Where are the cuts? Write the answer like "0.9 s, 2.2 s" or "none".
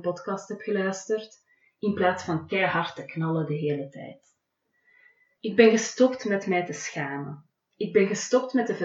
5.3 s